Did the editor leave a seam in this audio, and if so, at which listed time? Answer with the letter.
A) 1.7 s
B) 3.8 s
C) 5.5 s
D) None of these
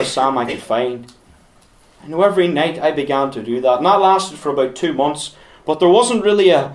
D